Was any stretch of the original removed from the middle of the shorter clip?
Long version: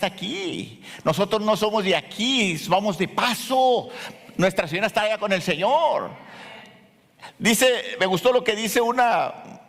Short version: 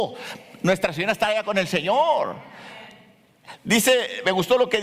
no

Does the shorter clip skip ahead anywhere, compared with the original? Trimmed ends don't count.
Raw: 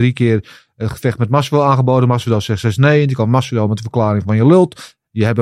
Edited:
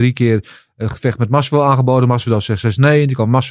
no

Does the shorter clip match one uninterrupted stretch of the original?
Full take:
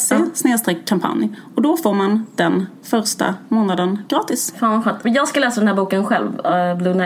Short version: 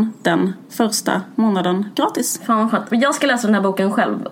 yes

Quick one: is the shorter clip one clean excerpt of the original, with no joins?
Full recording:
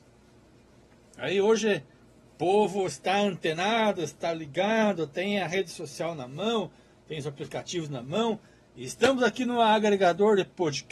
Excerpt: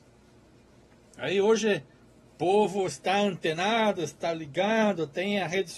yes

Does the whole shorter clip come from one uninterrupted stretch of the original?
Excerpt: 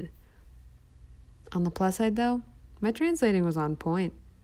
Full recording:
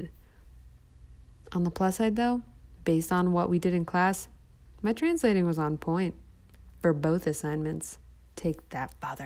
no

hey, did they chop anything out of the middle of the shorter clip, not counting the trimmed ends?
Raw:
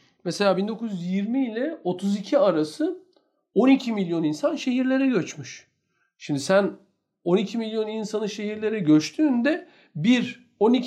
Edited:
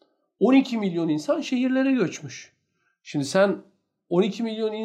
no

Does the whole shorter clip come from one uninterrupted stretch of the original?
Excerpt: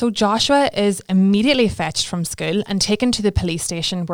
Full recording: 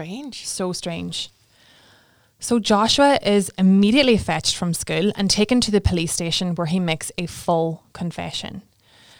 yes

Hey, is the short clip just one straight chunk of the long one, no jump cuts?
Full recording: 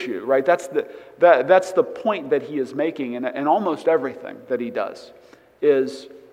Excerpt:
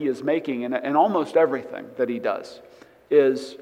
yes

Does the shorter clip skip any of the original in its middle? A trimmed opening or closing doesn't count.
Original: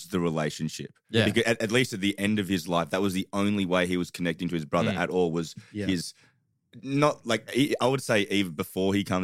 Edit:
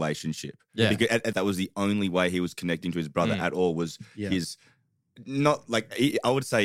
yes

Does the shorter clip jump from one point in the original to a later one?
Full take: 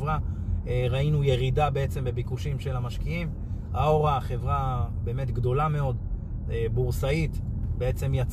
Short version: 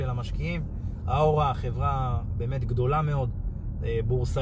no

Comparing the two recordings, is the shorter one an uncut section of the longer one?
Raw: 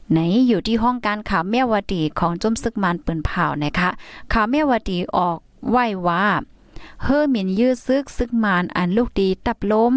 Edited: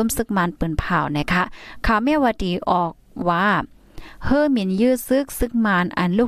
no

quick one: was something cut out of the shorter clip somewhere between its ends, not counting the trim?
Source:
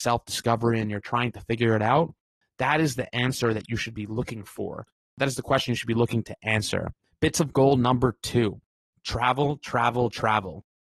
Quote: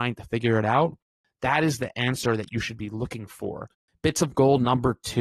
yes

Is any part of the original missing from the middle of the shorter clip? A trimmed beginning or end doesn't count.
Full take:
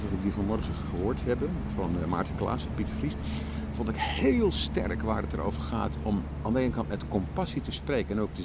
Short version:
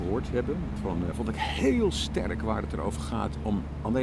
yes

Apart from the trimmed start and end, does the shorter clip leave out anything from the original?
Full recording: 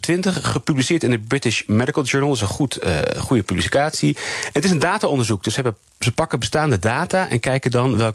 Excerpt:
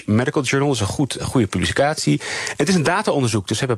yes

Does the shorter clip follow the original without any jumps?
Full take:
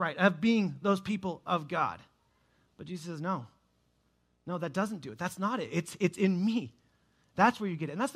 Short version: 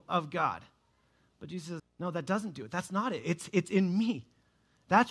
no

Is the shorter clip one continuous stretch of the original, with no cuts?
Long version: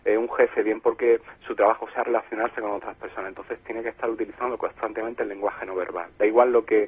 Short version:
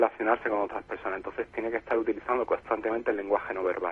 yes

